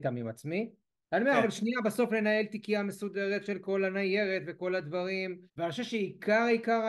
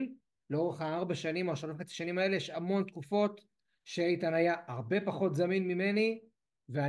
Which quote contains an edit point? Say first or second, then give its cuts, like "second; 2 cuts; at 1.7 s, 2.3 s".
first; 2 cuts; at 1.0 s, 5.5 s